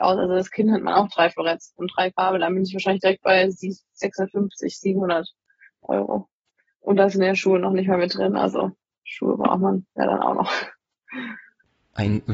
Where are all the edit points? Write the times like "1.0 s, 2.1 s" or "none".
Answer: none